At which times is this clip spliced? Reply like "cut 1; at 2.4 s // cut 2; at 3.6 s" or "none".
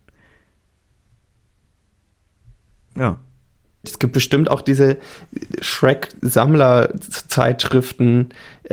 cut 1; at 3.8 s